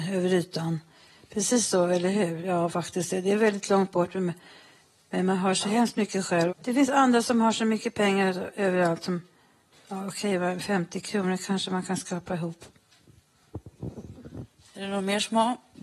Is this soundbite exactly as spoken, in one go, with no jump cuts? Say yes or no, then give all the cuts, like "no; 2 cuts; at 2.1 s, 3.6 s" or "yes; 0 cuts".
no; 1 cut; at 6.5 s